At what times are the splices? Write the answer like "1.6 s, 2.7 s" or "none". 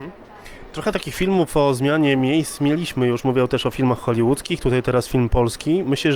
none